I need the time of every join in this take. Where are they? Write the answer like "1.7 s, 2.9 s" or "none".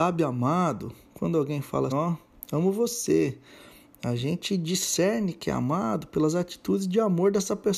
1.9 s